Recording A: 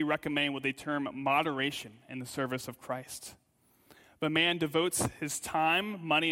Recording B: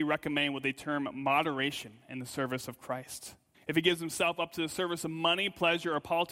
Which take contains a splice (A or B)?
B